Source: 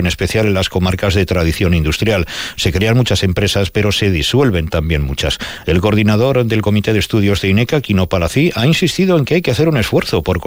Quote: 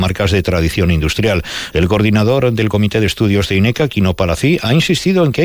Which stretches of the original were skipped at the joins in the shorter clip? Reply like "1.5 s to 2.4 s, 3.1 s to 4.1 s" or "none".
2.5 s to 5.6 s